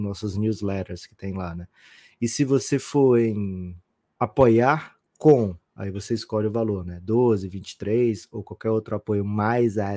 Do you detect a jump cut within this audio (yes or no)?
no